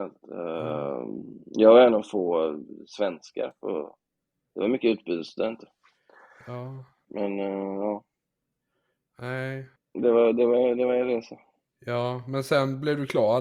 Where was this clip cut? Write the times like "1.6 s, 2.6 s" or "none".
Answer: 7.1 s